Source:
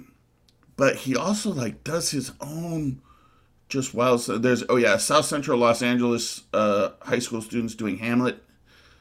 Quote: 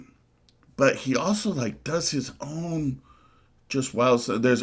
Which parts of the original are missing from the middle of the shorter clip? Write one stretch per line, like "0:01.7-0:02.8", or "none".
none